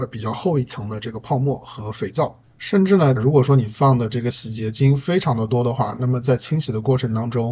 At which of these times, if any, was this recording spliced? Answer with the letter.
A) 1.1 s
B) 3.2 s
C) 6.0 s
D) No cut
B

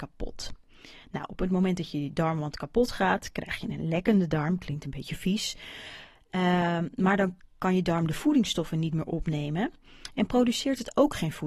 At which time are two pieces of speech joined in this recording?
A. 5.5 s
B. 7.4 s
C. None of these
B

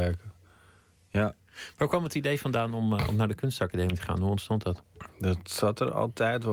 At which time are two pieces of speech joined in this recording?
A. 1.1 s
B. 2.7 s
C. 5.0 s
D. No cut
C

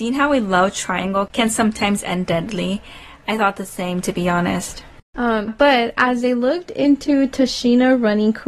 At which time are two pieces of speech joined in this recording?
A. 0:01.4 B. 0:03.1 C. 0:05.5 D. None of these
C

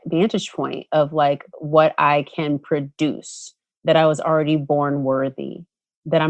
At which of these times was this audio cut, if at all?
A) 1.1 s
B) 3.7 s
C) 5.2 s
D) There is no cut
B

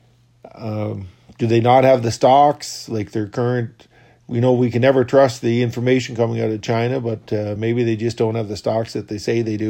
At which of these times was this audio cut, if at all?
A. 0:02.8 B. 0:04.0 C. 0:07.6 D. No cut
D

